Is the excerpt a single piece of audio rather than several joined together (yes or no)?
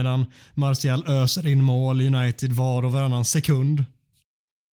yes